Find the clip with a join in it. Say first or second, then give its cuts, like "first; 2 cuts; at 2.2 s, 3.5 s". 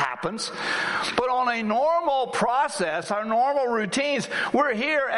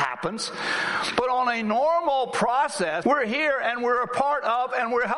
second; 1 cut; at 3.0 s